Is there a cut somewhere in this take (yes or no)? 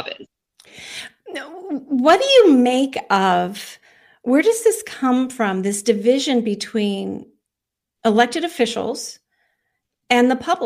no